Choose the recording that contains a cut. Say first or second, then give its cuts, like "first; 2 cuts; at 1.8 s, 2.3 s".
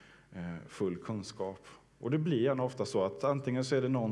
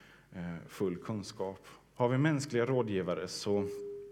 second; 1 cut; at 1.9 s